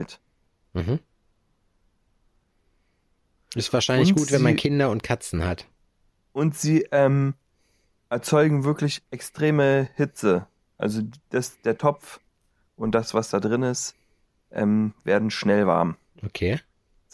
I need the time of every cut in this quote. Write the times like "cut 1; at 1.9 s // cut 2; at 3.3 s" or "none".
none